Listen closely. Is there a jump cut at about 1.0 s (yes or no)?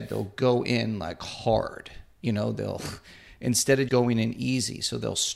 no